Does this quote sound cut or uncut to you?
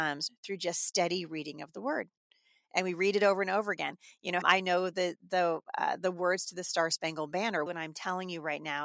cut